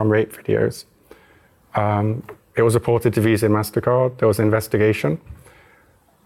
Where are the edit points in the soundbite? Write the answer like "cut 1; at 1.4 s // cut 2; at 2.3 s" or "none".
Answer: cut 1; at 1.6 s

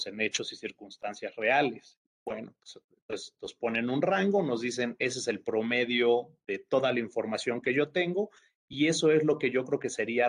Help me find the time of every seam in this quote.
cut 1; at 2.1 s

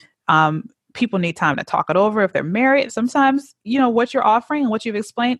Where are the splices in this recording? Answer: cut 1; at 2.9 s

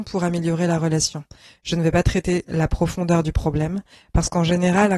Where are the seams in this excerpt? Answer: none

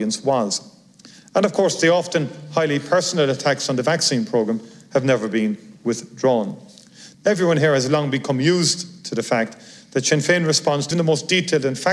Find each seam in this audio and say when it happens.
cut 1; at 7.1 s // cut 2; at 10.9 s

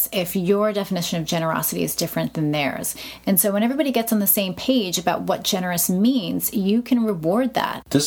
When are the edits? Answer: none

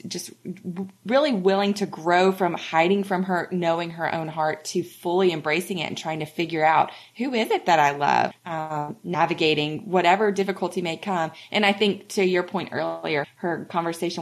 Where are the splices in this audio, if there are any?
cut 1; at 8.3 s // cut 2; at 13.2 s

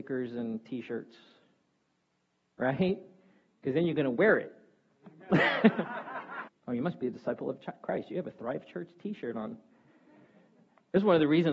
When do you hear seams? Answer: cut 1; at 6.5 s

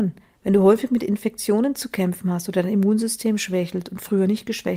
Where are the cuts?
none

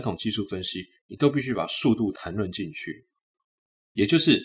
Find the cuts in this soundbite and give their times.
none

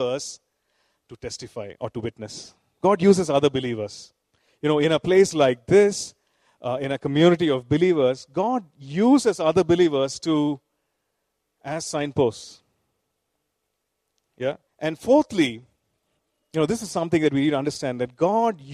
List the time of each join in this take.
cut 1; at 14.7 s

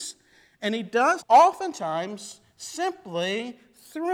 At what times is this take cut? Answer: cut 1; at 1.2 s

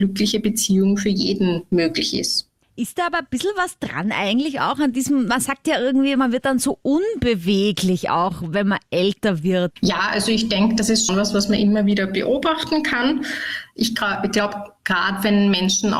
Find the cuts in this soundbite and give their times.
cut 1; at 9.7 s // cut 2; at 11.1 s

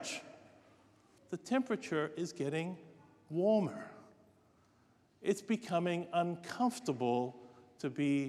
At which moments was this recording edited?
cut 1; at 1.2 s

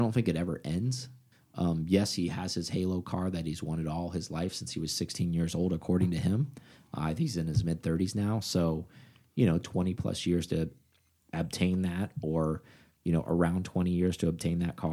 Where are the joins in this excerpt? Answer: none

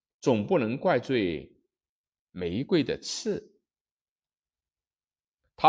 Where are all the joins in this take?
none

